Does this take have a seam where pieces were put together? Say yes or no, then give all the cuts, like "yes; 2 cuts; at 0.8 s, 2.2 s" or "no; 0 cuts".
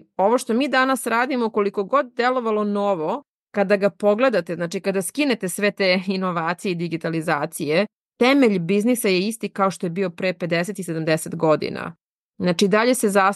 no; 0 cuts